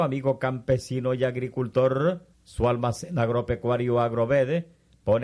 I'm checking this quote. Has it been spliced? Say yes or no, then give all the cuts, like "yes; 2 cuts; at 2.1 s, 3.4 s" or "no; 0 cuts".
yes; 1 cut; at 2.3 s